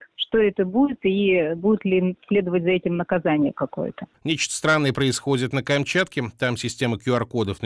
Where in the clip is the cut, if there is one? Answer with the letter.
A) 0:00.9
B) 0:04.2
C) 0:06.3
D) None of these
D